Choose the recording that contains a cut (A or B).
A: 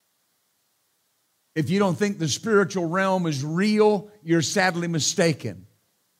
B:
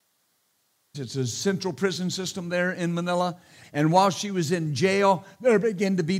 B